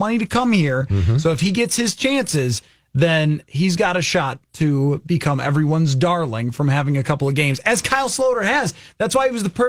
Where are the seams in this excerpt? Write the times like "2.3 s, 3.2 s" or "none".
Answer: none